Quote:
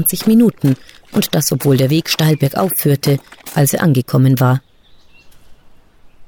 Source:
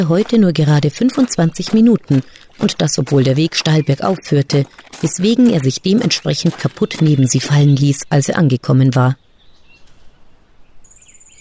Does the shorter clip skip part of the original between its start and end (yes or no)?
yes